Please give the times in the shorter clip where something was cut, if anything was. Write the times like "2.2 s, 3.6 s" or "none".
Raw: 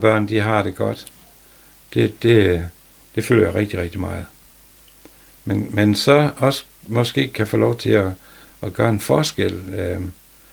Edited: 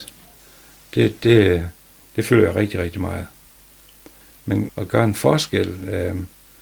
4.7 s